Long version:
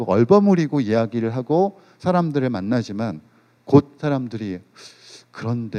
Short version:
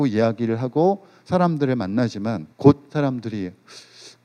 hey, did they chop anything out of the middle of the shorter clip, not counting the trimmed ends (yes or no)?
yes